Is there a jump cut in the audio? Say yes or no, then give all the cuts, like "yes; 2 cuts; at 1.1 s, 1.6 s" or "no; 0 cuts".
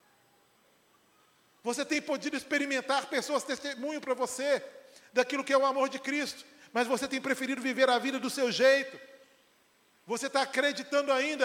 no; 0 cuts